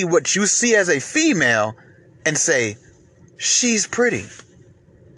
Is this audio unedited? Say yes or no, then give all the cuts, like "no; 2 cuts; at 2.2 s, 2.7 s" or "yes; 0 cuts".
yes; 0 cuts